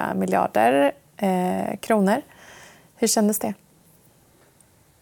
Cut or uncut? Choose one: uncut